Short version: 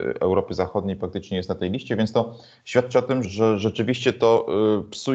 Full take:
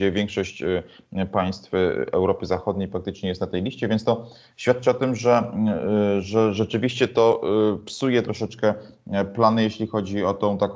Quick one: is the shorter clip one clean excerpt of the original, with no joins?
no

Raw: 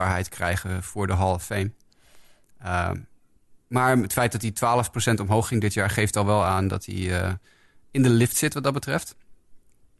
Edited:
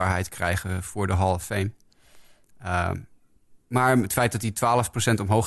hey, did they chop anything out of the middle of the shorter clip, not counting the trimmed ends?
no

